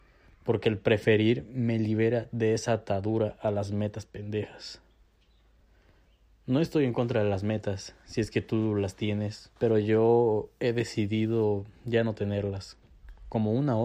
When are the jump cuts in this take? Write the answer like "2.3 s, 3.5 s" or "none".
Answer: 9.6 s